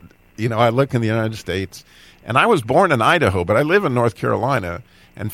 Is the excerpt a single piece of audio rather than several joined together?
yes; 0 cuts

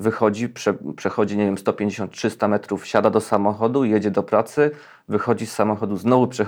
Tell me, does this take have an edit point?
no; 0 cuts

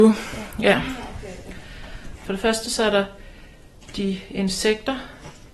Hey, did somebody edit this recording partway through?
yes; 1 cut; at 2.1 s

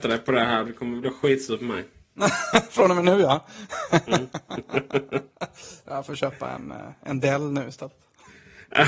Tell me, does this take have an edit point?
no; 0 cuts

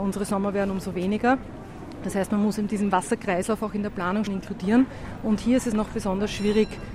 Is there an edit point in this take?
yes; 2 cuts; at 2.7 s, 4.3 s

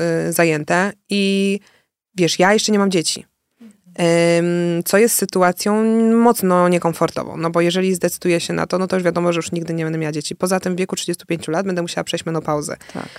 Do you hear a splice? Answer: no; 0 cuts

